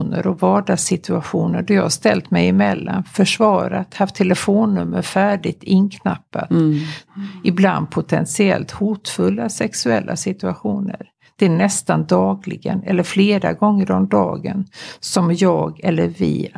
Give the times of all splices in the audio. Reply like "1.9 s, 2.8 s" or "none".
7.1 s